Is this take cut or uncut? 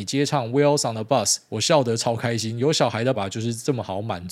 cut